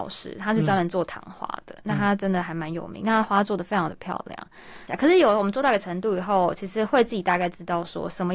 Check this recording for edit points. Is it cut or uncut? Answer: cut